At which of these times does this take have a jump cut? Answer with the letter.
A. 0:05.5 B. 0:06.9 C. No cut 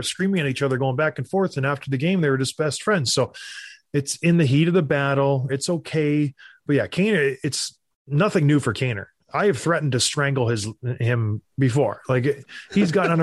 A